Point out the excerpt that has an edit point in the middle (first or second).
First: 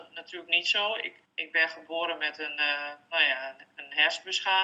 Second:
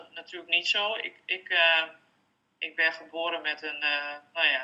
first